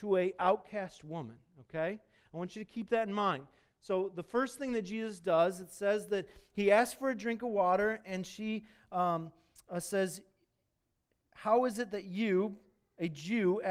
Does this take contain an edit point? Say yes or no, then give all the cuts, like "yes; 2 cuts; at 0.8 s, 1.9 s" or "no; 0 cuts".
no; 0 cuts